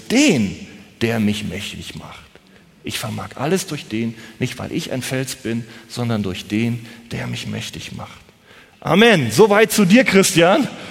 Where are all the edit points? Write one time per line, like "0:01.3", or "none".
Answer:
0:08.7